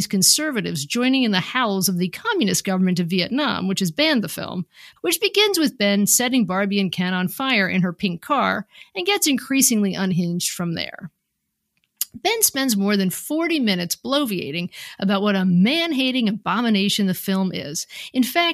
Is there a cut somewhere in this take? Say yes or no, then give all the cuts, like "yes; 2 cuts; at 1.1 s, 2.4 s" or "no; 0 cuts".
yes; 1 cut; at 5.0 s